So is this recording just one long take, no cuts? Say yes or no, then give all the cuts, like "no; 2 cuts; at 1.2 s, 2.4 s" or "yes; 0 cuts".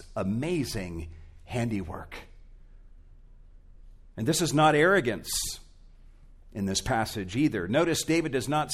yes; 0 cuts